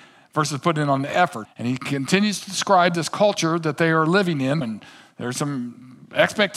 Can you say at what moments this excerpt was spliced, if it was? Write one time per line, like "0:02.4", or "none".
0:01.4
0:04.6